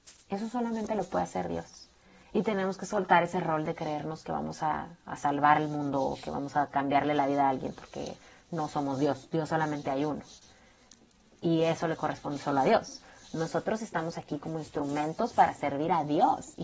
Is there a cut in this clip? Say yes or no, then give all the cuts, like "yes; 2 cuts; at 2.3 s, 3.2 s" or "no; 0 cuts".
no; 0 cuts